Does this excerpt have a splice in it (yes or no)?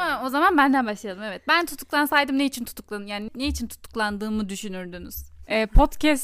yes